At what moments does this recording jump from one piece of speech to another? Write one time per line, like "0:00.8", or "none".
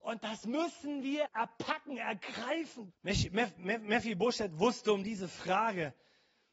0:01.3
0:02.9

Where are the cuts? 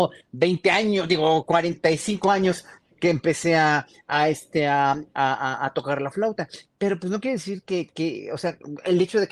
none

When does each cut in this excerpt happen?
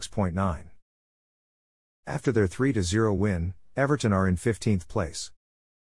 none

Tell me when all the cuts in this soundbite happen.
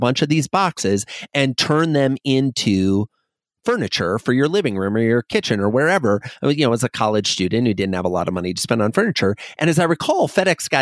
none

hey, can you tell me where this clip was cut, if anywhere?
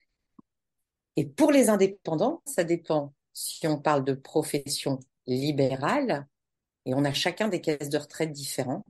0:02.5

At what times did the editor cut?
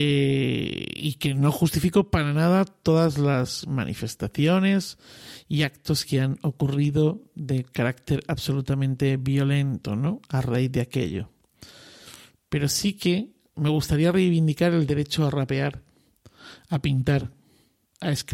0:13.5

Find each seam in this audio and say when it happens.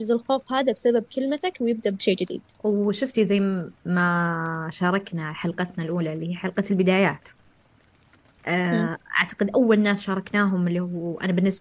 0:02.5

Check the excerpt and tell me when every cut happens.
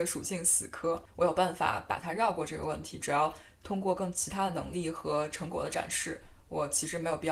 0:01.1

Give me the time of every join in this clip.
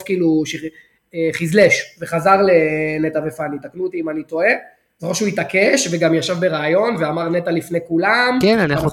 none

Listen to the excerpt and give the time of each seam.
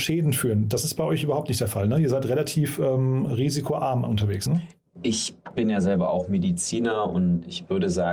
none

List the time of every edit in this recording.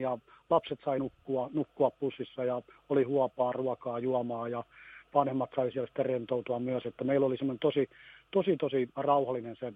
none

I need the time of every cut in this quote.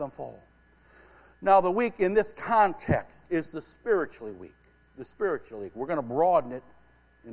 0:03.2

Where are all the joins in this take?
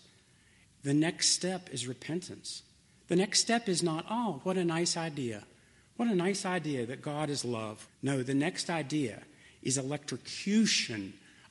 0:07.9

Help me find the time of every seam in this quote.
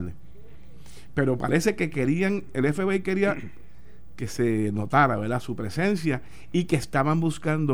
none

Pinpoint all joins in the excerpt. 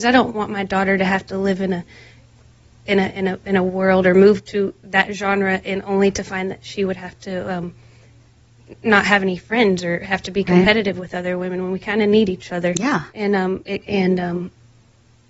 0:12.7
0:13.8

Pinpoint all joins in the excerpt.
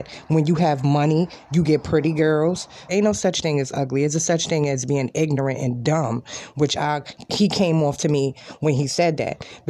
0:02.9

